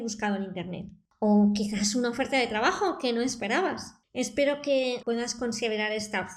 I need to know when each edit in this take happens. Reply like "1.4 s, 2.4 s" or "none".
5.0 s